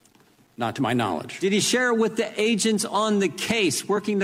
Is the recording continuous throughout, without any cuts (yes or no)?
yes